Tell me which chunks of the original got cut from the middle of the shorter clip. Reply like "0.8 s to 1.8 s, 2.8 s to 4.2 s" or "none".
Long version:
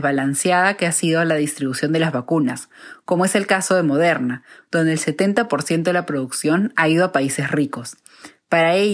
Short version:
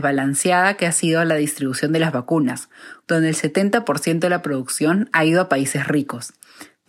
3.0 s to 4.6 s